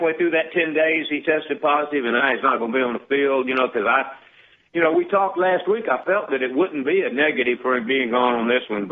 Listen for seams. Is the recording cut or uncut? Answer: uncut